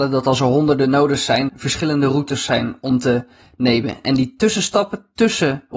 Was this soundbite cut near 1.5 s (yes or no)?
yes